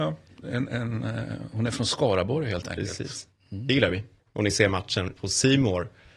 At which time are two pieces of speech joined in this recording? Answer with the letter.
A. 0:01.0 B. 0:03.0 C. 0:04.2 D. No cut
C